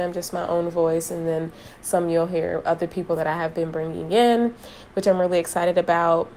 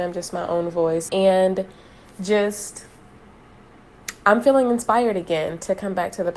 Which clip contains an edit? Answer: second; 1 cut; at 1.1 s

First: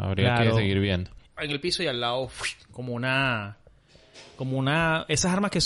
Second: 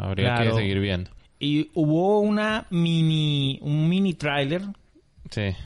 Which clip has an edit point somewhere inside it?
first; 1 cut; at 1.4 s

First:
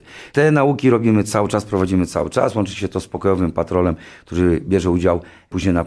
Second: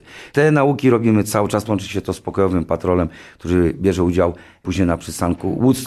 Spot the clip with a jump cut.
second; 1 cut; at 1.7 s

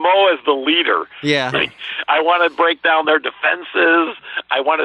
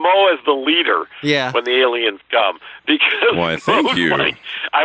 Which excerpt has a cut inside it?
first; 1 cut; at 1.5 s

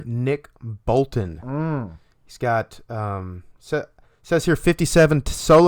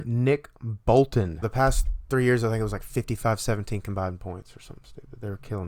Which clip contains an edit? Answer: second; 1 cut; at 1.4 s

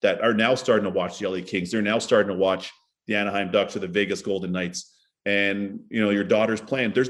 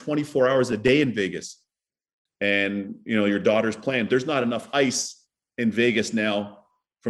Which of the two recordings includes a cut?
second; 1 cut; at 2.3 s

